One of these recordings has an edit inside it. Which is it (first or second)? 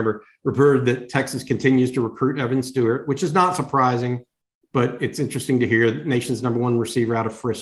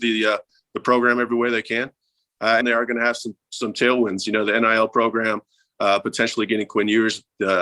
second